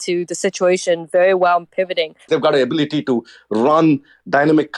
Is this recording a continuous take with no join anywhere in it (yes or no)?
no